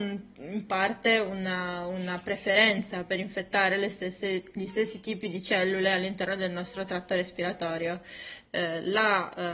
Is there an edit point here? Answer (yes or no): yes